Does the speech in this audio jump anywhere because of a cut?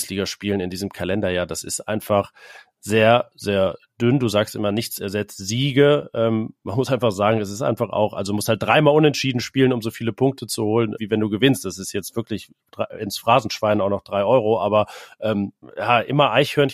yes; 2 cuts; at 11.0 s, 15.6 s

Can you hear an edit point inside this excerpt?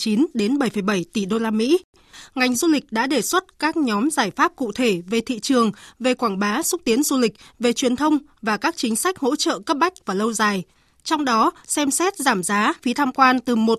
yes; 1 cut; at 12.8 s

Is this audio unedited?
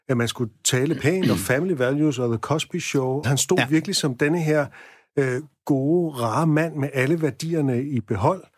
no; 1 cut; at 3.2 s

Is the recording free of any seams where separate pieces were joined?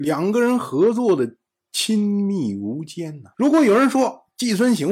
no; 1 cut; at 3.3 s

